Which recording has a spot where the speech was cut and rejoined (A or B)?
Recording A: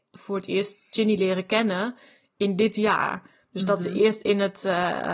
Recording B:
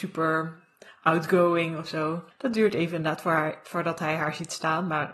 B